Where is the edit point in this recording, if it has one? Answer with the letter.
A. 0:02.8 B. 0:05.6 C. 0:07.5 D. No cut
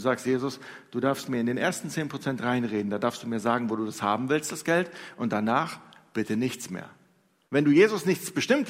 C